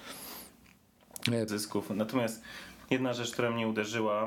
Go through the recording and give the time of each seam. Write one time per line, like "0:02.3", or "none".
0:01.5